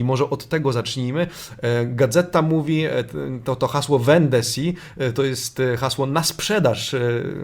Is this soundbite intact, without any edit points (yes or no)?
yes